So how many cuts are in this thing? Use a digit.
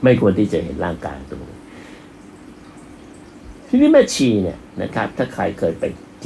1